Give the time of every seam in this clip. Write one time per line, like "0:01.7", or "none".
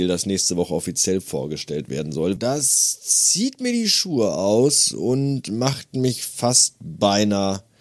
0:02.4